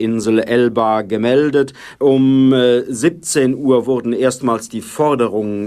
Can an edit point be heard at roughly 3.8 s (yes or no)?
no